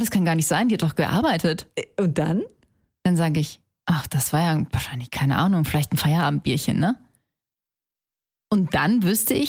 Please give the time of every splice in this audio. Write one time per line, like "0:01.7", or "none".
none